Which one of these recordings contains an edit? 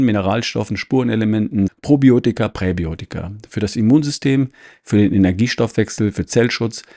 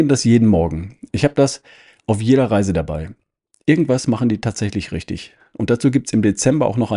first; 1 cut; at 1.7 s

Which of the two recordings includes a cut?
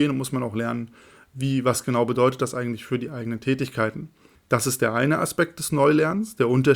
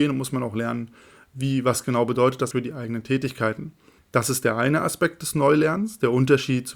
second; 1 cut; at 2.5 s

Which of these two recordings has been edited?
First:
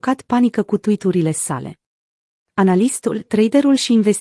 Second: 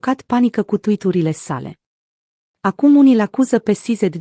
first; 1 cut; at 2.5 s

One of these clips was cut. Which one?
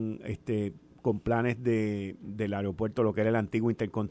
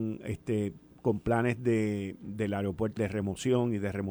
second; 1 cut; at 3.0 s

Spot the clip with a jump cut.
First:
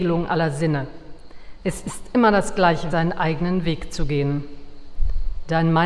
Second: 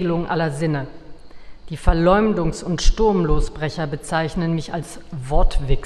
first; 2 cuts; at 1.6 s, 2.9 s

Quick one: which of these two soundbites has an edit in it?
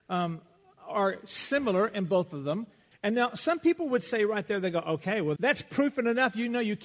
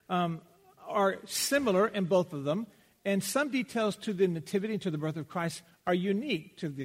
first; 2 cuts; at 2.9 s, 5.4 s

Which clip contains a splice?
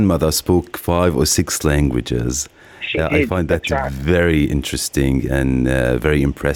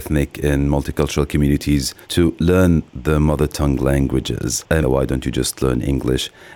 second; 2 cuts; at 2.0 s, 4.8 s

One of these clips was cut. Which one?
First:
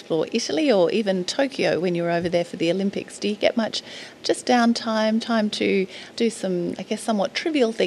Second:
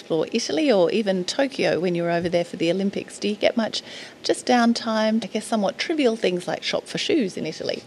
second; 1 cut; at 5.2 s

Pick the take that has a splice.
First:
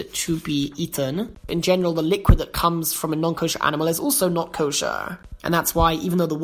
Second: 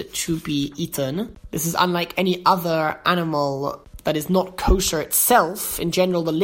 first; 2 cuts; at 1.5 s, 5.4 s

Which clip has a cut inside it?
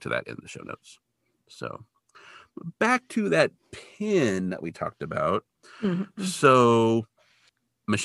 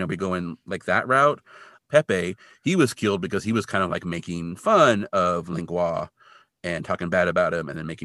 second; 1 cut; at 1.8 s

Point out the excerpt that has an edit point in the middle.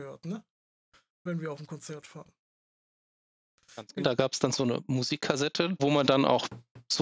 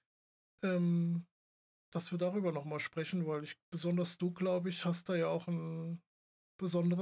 first; 2 cuts; at 4.0 s, 5.8 s

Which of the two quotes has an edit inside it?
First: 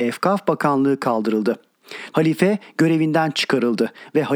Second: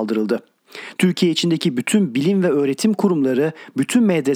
first; 1 cut; at 2.1 s

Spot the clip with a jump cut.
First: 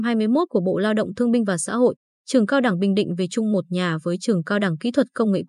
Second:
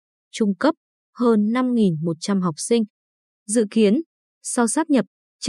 second; 1 cut; at 3.3 s

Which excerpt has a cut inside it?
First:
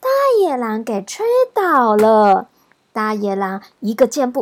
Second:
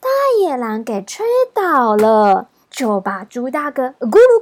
second; 1 cut; at 2.6 s

